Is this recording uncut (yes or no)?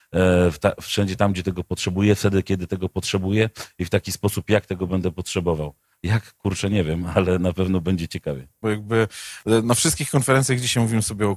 no